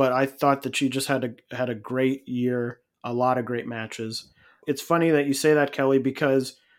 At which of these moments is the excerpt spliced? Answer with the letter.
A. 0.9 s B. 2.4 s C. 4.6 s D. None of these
C